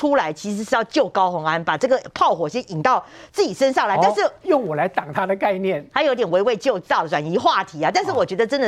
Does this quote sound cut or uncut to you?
uncut